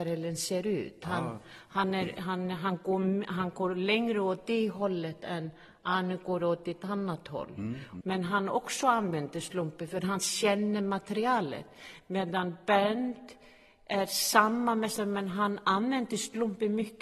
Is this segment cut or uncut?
cut